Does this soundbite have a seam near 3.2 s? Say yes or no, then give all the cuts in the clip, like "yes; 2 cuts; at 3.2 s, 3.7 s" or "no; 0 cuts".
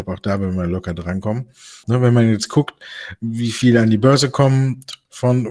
no; 1 cut; at 1.8 s